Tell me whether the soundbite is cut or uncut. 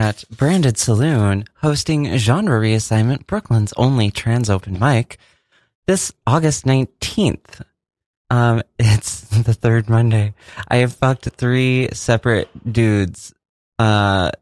uncut